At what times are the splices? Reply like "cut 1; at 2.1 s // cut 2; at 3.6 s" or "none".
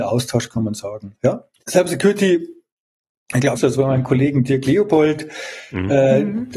cut 1; at 3.6 s